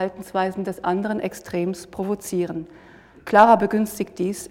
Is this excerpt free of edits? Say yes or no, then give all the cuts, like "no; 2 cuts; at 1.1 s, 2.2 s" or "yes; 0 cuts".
yes; 0 cuts